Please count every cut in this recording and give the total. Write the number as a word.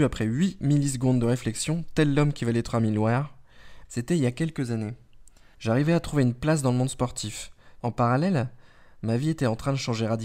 three